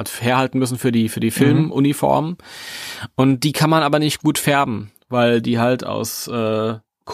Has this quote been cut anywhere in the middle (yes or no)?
no